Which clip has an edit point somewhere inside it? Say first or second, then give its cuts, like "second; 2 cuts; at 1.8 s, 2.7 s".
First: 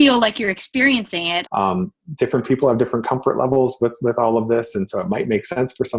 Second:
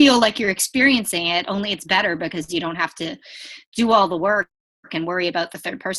first; 1 cut; at 1.5 s